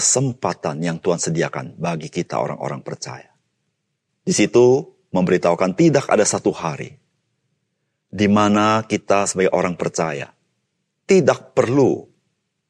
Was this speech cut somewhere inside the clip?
yes; 1 cut; at 4.1 s

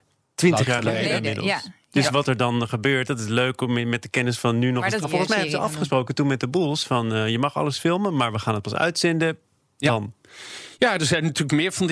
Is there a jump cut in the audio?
yes; 1 cut; at 5.0 s

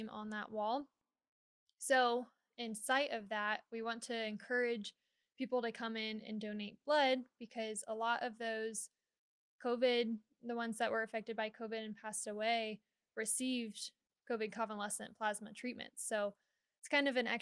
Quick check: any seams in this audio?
no; 0 cuts

